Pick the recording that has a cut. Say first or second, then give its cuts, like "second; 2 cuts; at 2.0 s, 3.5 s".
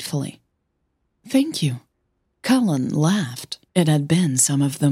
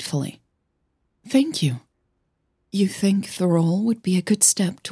first; 2 cuts; at 2.2 s, 3.7 s